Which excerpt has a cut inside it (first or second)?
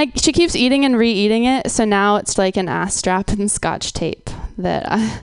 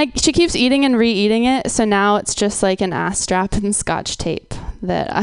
first